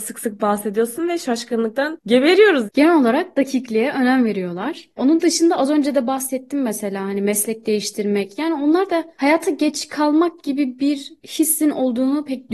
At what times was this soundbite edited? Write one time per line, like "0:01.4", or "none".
0:02.7

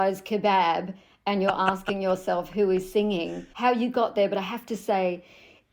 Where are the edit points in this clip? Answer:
0:03.5

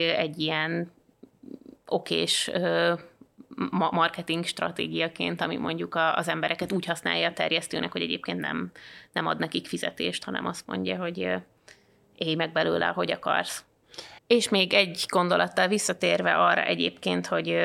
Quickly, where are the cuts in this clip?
0:14.2

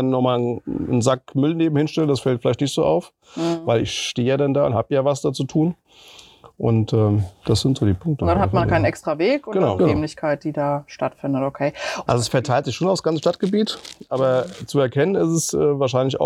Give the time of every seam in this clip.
0:09.8
0:12.1

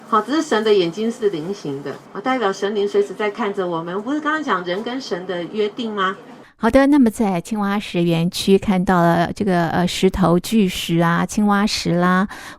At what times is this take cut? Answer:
0:02.1
0:06.4

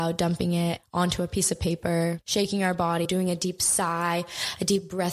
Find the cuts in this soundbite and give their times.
0:03.0

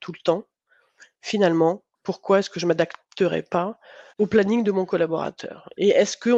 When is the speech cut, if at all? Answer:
0:01.9
0:04.1

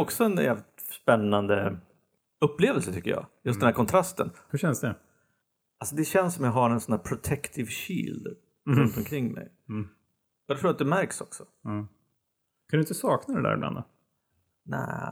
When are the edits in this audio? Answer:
0:04.5
0:10.4

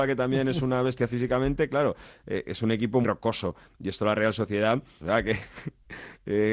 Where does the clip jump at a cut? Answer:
0:03.0
0:05.0

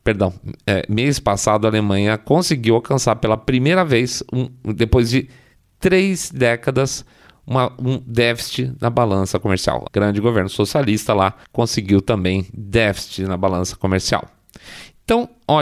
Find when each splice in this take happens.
0:09.9
0:11.4

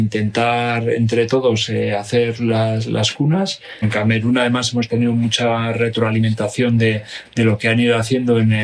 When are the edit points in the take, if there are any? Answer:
none

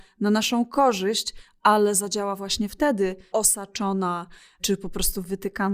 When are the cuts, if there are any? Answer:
0:03.3

